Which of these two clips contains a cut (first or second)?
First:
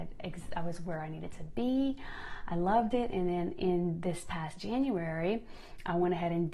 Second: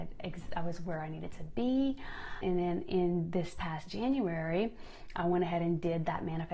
second